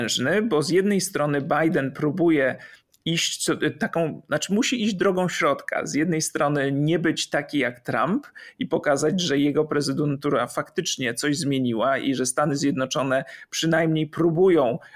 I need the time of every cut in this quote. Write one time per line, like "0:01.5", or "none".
none

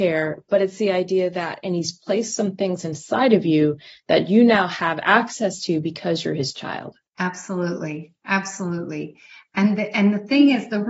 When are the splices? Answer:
none

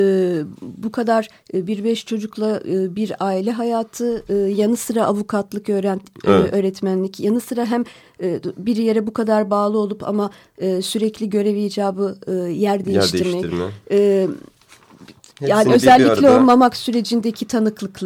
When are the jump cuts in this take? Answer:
none

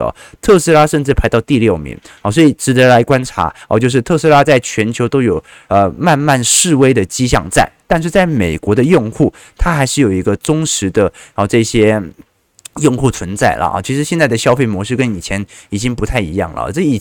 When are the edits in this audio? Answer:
none

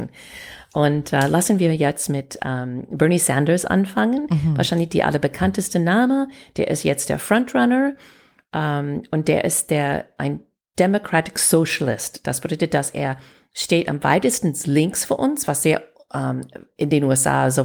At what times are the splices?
none

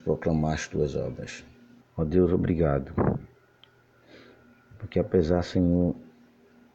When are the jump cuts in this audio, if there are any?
0:01.8

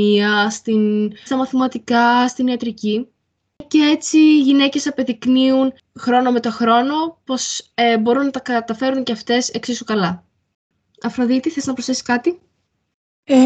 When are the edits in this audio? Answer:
0:01.3

